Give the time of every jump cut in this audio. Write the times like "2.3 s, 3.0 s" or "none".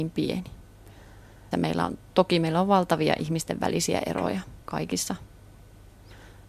1.5 s, 4.6 s